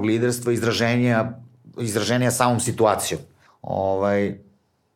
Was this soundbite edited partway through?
yes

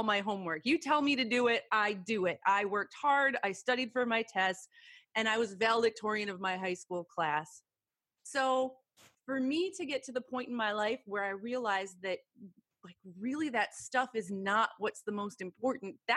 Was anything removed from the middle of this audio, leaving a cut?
no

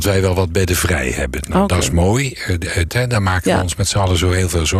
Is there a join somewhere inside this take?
yes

